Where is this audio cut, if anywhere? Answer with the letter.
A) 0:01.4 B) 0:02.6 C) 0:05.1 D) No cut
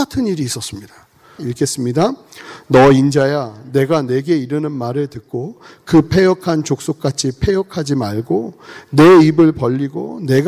A